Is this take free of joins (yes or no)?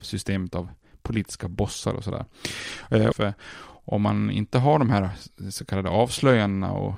no